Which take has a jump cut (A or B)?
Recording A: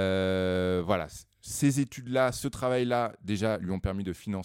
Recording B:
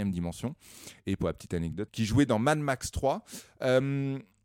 B